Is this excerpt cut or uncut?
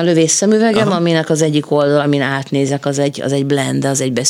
uncut